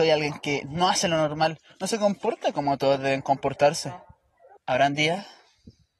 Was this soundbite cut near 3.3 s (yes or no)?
no